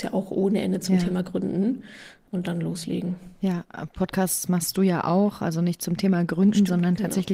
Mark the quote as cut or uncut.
uncut